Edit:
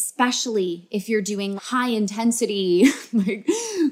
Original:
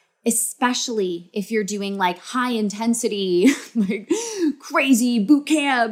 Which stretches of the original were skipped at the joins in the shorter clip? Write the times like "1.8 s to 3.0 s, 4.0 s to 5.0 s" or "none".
2.0 s to 2.2 s